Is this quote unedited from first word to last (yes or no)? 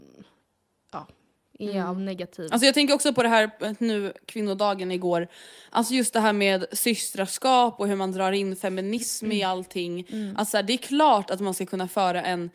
yes